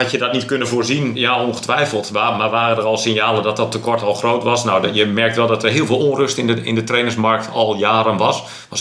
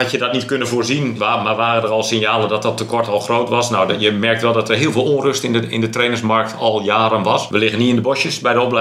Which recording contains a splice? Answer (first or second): second